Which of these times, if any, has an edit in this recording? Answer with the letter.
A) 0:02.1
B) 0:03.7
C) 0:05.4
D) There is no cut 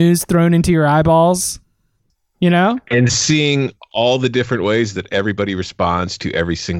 A